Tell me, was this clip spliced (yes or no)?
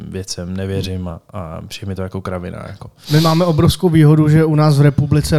no